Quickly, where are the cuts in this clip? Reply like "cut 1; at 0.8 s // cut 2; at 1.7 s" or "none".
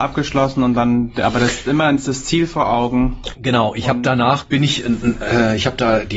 none